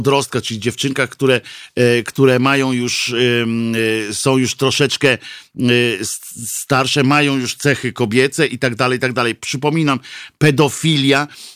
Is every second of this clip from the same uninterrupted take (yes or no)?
yes